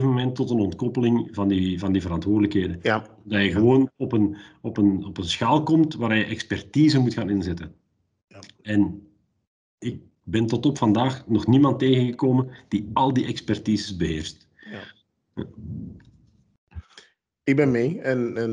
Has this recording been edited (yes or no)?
no